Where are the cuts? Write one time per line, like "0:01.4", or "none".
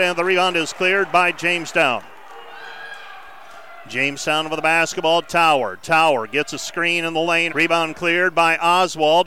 0:07.5